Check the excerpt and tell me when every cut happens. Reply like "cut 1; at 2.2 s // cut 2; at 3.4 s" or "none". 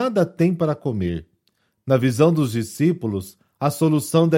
none